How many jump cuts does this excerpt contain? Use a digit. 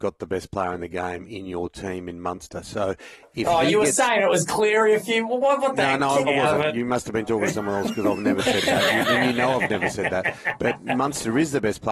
1